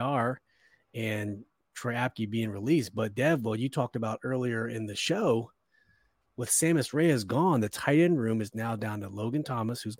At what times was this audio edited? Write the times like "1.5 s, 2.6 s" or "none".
none